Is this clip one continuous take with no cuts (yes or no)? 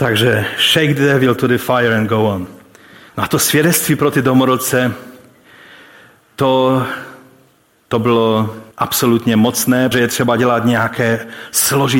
no